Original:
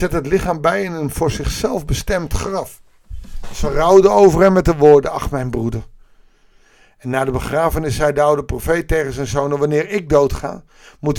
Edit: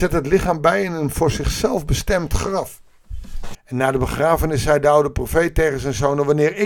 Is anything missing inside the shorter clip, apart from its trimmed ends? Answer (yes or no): yes